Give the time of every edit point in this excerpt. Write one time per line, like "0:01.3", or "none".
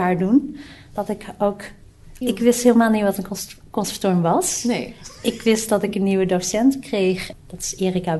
0:02.2

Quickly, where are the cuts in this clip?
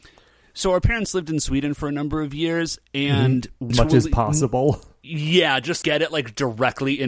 0:03.7
0:05.8

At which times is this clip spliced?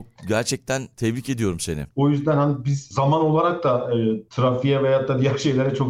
0:01.9

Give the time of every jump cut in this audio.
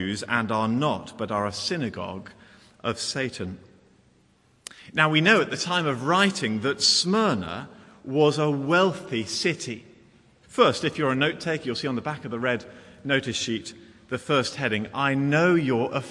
0:10.4

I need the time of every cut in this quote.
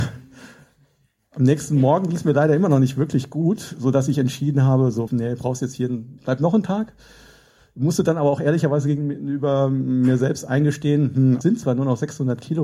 0:05.1
0:06.2
0:11.4

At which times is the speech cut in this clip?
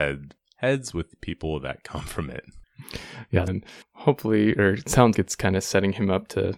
0:03.5
0:05.1

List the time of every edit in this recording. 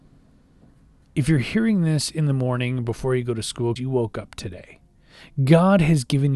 0:03.8

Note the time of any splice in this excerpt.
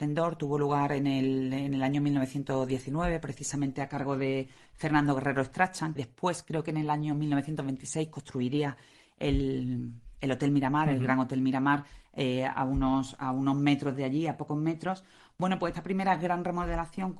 0:06.0

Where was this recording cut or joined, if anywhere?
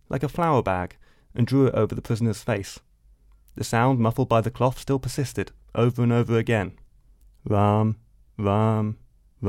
none

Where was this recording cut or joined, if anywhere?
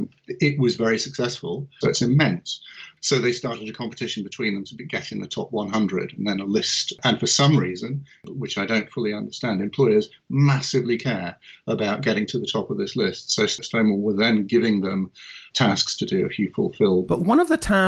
0:01.8

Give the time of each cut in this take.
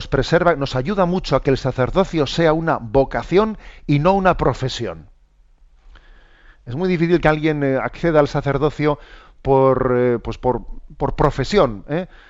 none

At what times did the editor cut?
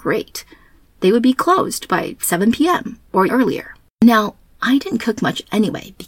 0:03.3

